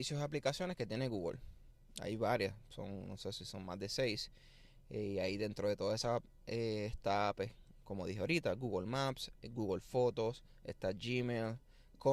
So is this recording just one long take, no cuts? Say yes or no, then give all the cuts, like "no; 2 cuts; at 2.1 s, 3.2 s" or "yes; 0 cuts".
yes; 0 cuts